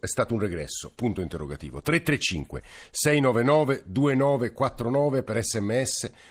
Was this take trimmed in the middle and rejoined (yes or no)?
no